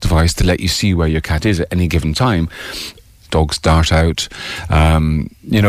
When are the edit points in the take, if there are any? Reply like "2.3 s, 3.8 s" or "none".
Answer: 3.3 s